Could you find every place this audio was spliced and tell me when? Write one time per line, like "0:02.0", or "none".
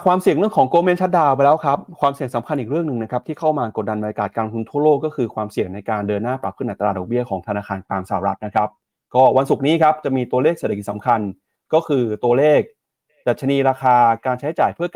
none